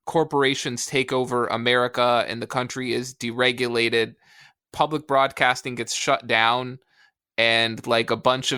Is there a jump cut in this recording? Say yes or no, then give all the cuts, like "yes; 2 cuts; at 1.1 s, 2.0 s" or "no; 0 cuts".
no; 0 cuts